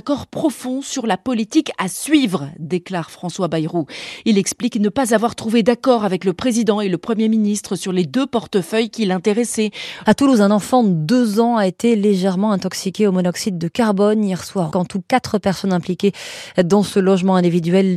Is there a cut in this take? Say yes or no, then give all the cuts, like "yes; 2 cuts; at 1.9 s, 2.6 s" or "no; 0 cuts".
yes; 2 cuts; at 10.0 s, 14.7 s